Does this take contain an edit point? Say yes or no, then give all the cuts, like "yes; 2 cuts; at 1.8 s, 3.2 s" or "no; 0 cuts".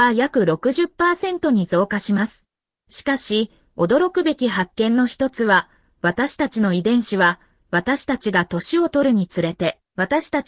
yes; 1 cut; at 2.7 s